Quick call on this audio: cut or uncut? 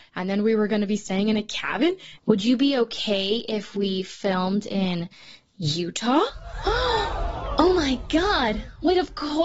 cut